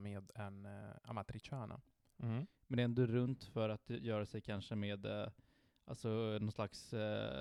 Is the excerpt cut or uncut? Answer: cut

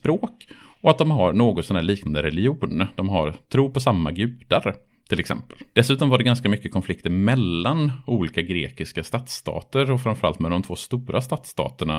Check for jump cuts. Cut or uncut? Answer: cut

